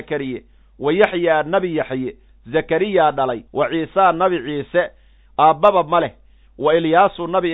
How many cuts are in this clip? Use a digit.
1